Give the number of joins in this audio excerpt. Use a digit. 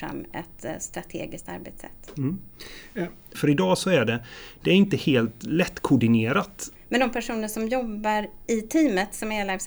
2